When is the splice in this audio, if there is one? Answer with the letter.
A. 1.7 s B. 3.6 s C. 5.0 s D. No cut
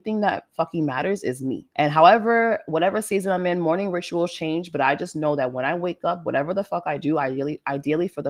A